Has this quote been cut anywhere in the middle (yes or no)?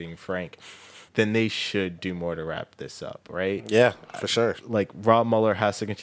yes